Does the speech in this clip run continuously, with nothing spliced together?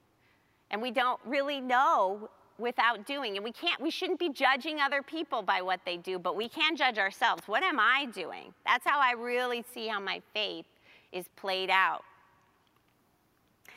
yes; 0 cuts

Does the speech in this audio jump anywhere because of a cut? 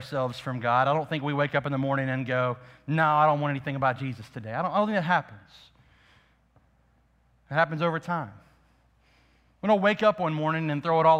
no; 0 cuts

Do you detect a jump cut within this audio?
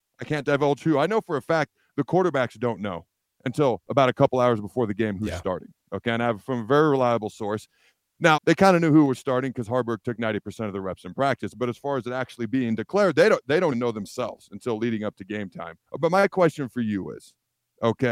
yes; 3 cuts; at 8.4 s, 13.7 s, 15.9 s

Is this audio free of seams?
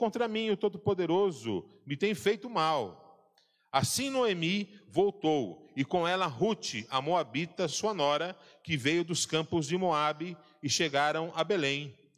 yes; 0 cuts

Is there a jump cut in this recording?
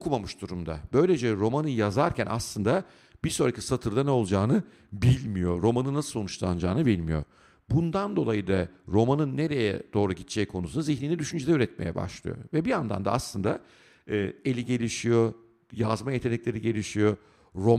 no; 0 cuts

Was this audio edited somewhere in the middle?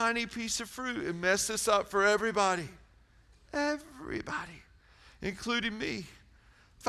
no; 0 cuts

